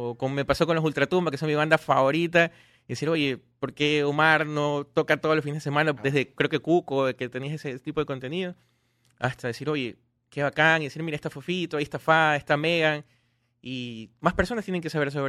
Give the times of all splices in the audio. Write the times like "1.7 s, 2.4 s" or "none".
6.0 s